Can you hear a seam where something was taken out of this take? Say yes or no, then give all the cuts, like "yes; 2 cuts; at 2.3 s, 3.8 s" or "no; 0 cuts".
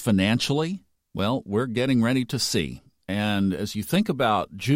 no; 0 cuts